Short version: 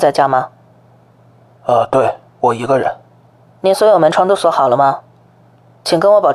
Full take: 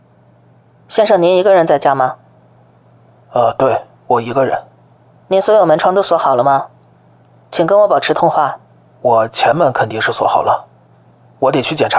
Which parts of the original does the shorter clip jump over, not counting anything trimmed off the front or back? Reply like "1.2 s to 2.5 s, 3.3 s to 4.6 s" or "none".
none